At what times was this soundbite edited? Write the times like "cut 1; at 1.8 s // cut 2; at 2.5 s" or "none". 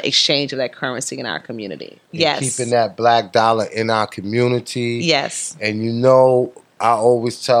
cut 1; at 2.1 s